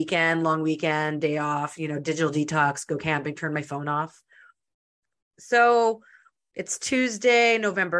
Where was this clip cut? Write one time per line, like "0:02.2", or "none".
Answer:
0:05.3